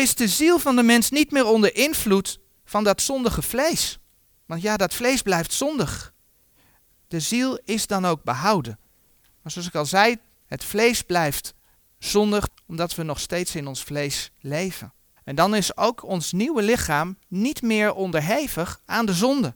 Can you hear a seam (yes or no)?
yes